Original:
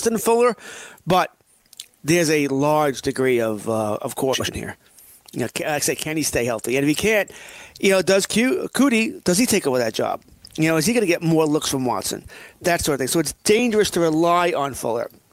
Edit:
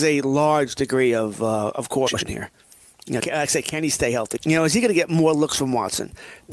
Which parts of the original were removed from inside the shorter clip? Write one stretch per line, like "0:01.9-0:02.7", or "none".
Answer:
0:05.5-0:05.5
0:06.7-0:10.5